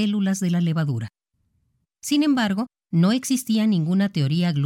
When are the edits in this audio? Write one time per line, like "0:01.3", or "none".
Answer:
0:01.8